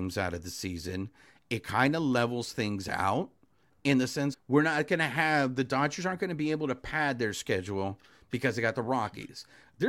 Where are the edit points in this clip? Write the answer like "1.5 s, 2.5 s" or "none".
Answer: 4.3 s